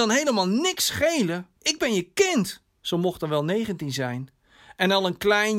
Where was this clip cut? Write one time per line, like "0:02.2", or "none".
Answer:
0:01.5
0:02.8